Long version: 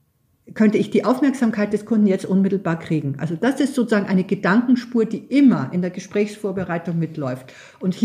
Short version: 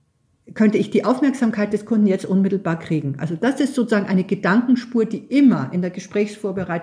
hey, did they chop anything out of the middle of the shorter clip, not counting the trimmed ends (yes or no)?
no